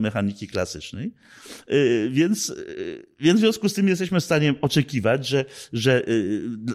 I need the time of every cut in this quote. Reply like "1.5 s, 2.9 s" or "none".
none